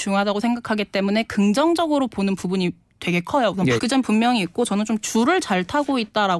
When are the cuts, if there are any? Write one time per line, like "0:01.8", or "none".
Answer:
0:03.8